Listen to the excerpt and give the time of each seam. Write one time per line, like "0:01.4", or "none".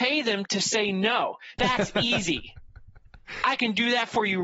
0:01.6